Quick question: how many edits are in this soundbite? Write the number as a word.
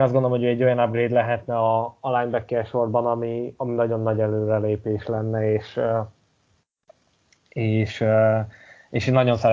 zero